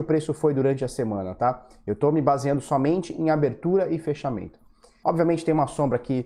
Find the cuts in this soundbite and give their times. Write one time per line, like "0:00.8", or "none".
0:05.0